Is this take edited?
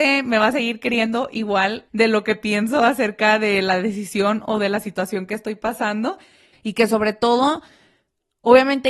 yes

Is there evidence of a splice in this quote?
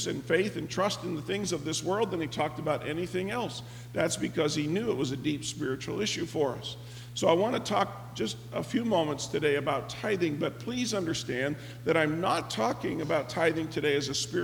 no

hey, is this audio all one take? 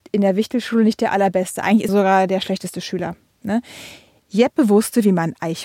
no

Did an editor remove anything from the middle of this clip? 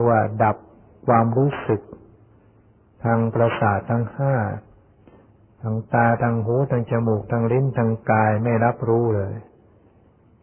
no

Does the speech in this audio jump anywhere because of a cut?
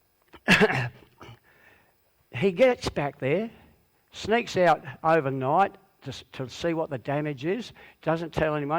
no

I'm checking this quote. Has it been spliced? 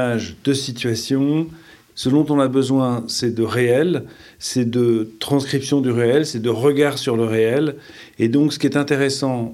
no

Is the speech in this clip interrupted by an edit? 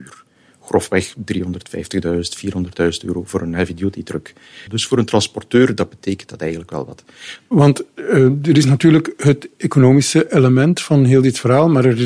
yes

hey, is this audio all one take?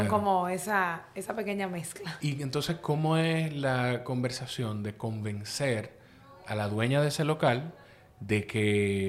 yes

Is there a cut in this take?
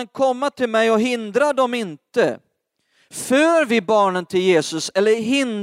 no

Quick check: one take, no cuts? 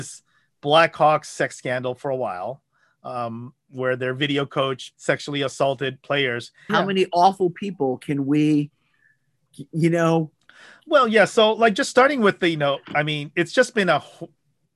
no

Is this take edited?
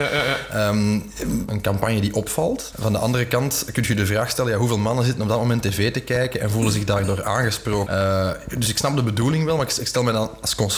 yes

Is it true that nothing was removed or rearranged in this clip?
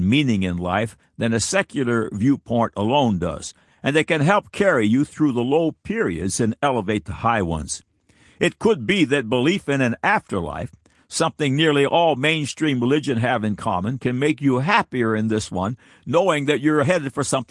yes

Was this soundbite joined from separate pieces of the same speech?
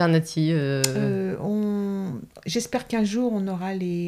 no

